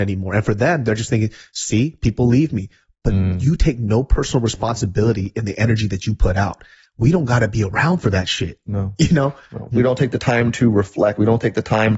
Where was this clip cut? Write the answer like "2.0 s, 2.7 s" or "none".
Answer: 9.7 s